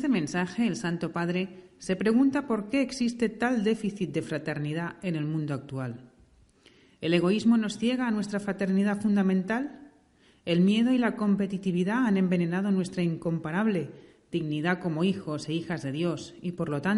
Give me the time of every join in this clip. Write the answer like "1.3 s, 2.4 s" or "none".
none